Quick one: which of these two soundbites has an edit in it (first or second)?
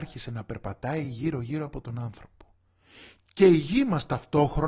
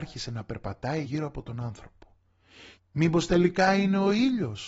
second